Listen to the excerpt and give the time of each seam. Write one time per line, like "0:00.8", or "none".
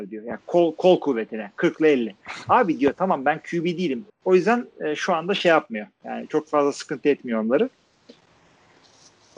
0:04.1